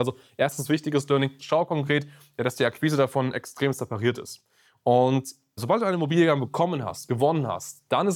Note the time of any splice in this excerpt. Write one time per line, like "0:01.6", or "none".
0:01.4